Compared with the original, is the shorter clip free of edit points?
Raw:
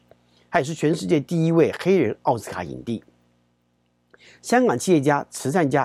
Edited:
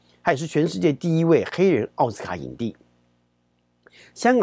yes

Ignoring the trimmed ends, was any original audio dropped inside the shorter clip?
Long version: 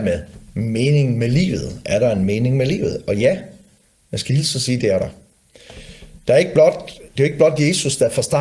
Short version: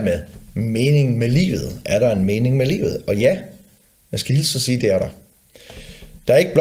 no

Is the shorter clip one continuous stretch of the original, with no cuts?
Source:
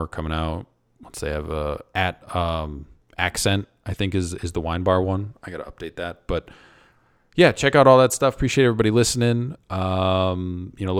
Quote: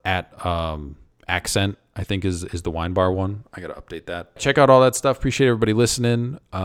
no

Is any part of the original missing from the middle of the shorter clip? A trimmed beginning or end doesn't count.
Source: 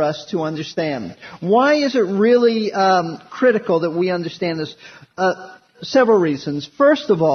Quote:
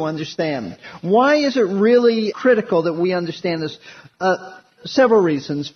yes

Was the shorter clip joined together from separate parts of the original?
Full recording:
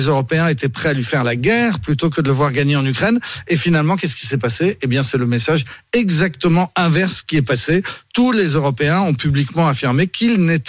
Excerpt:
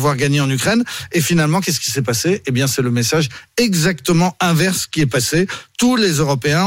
no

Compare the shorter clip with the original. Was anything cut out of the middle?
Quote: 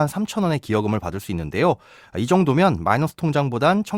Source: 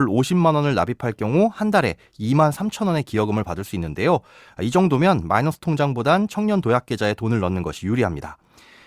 no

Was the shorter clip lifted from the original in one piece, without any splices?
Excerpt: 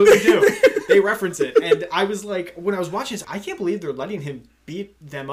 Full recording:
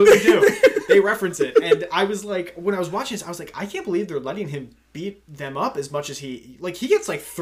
no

